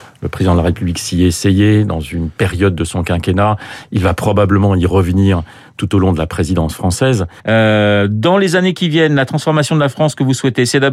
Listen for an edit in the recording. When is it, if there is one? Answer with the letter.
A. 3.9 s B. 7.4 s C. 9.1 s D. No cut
B